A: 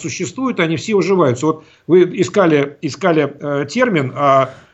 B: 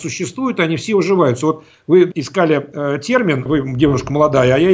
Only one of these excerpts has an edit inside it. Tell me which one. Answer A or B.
B